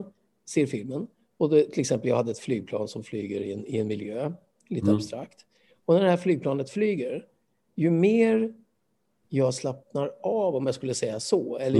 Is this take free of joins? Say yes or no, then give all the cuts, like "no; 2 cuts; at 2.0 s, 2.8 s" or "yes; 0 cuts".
yes; 0 cuts